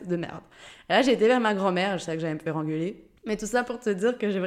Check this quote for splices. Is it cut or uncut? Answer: cut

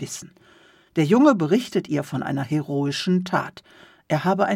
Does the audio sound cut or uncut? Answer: uncut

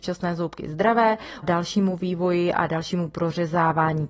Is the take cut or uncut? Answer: cut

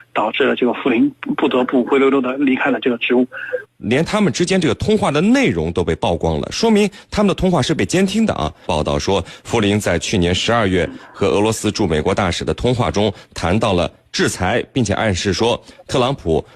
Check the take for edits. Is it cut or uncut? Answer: cut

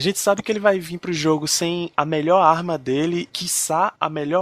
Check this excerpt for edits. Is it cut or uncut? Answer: uncut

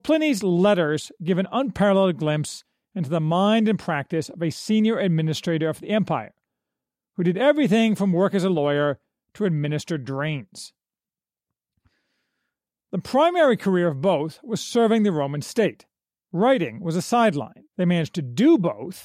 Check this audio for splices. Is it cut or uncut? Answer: cut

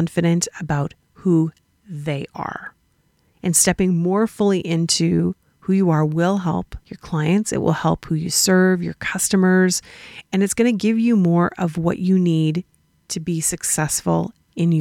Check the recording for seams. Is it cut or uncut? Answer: cut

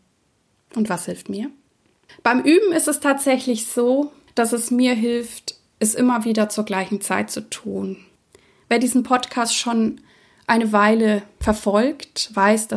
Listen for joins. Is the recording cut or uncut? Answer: uncut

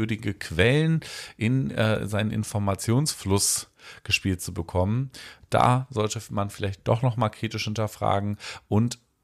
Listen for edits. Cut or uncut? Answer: uncut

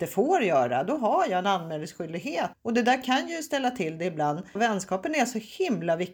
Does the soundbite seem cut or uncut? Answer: cut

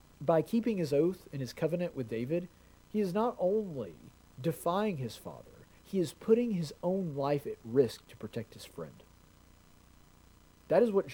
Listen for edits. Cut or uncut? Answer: uncut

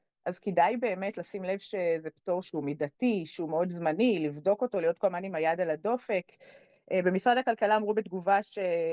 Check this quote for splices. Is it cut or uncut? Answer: cut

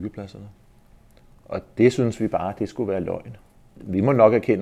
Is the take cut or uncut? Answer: uncut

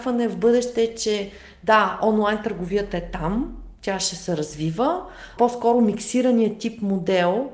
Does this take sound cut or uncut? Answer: cut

